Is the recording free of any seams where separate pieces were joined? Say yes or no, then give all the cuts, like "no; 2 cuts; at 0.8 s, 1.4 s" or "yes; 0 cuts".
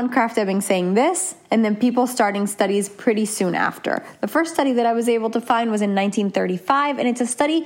yes; 0 cuts